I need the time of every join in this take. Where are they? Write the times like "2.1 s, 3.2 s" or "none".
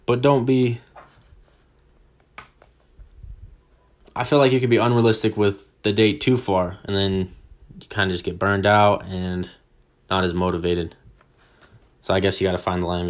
none